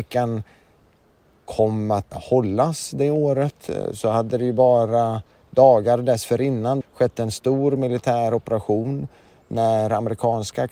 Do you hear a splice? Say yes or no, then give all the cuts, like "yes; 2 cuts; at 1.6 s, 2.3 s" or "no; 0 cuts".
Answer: yes; 2 cuts; at 2.1 s, 6.8 s